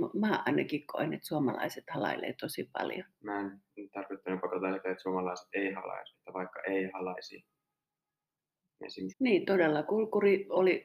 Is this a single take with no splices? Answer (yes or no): no